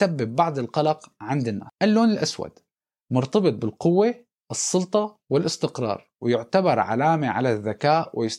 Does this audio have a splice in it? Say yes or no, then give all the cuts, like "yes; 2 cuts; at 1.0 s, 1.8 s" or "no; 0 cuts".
no; 0 cuts